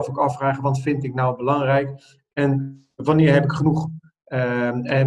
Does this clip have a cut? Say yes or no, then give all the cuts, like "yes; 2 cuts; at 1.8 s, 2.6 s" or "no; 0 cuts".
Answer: no; 0 cuts